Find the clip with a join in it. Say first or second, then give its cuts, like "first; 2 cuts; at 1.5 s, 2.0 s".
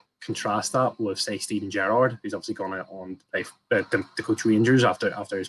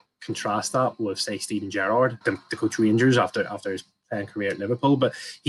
second; 1 cut; at 2.2 s